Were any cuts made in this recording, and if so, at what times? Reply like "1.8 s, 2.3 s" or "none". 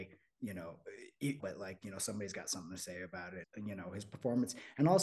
1.4 s, 3.4 s